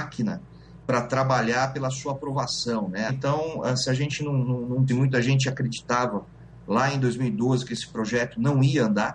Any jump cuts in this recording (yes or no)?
yes